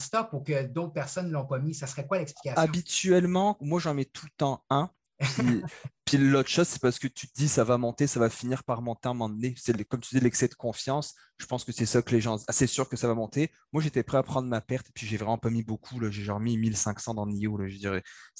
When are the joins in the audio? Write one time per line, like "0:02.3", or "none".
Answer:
none